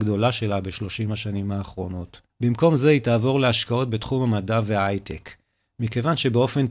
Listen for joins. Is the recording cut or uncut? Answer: cut